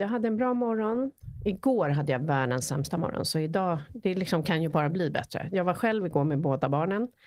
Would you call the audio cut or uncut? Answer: uncut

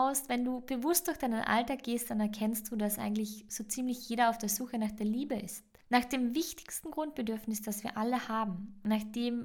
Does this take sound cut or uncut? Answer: uncut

